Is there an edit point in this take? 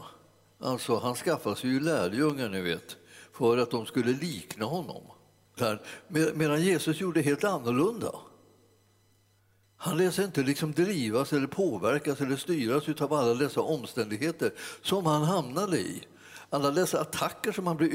yes; 1 cut; at 5.6 s

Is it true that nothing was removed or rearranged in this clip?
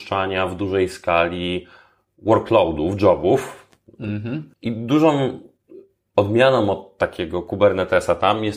no; 1 cut; at 4.5 s

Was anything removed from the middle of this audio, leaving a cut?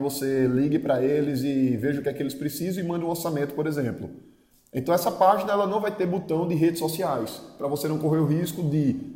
no; 0 cuts

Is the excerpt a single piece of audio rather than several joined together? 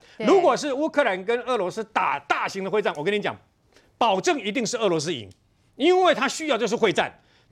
yes; 0 cuts

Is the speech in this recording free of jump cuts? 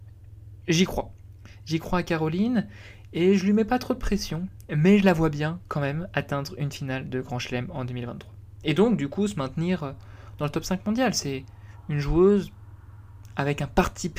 yes; 0 cuts

